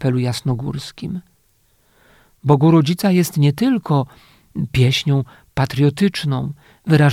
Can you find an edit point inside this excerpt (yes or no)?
no